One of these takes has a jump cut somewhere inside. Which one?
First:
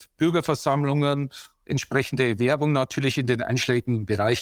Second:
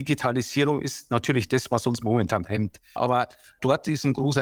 second; 1 cut; at 3.0 s

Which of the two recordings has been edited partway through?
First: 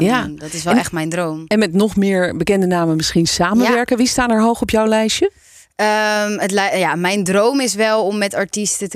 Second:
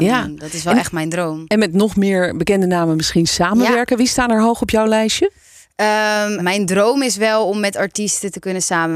second; 1 cut; at 6.4 s

